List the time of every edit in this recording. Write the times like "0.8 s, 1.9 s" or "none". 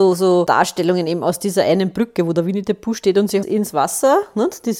3.4 s